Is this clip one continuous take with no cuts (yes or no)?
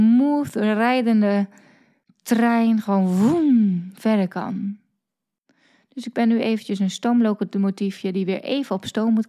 yes